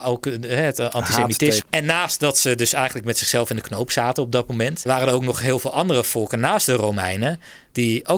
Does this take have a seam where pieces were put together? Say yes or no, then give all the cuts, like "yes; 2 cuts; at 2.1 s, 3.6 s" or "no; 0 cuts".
yes; 2 cuts; at 1.6 s, 4.9 s